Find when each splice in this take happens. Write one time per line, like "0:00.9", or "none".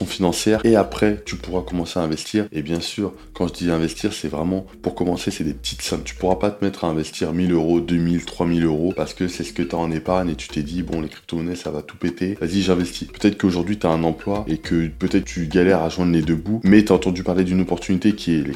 0:13.1

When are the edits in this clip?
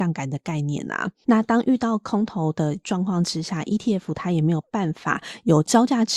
0:01.2

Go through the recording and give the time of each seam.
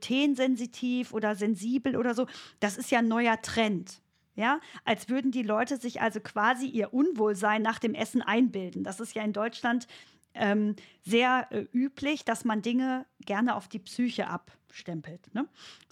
none

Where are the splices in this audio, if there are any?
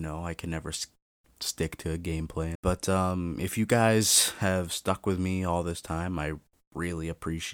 0:02.6

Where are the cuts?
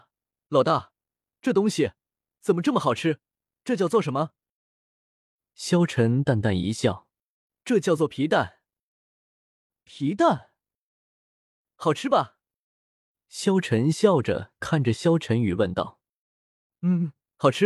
none

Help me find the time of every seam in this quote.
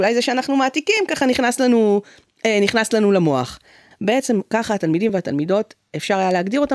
0:03.9

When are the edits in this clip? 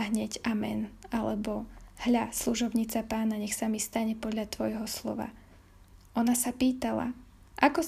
none

